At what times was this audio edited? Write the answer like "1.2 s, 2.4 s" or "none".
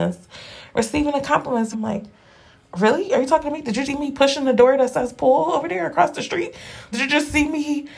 1.7 s, 3.8 s, 6.9 s